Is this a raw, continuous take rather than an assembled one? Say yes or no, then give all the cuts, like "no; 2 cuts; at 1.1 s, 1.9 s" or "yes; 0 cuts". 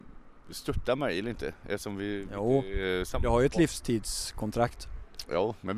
yes; 0 cuts